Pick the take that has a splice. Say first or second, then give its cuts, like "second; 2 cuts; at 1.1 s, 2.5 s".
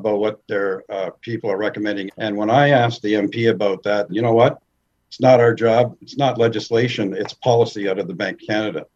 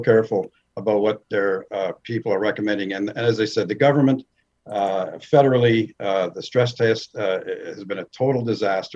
first; 2 cuts; at 2.1 s, 4.1 s